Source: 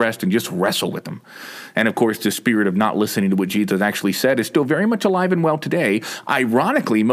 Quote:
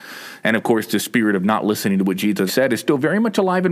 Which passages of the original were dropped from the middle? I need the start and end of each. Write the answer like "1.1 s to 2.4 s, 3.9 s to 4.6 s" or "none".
3.8 s to 4.1 s